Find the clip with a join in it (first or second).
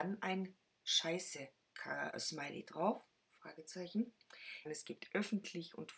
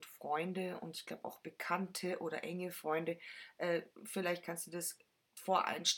first